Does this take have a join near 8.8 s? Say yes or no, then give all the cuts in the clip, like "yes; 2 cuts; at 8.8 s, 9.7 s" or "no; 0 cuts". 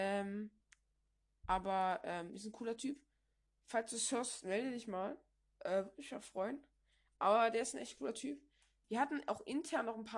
yes; 1 cut; at 8.8 s